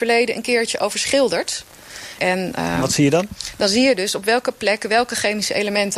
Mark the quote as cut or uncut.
cut